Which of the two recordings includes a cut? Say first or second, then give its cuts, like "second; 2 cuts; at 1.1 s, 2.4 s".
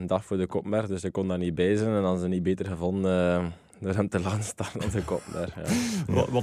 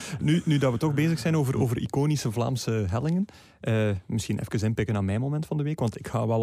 first; 1 cut; at 3.7 s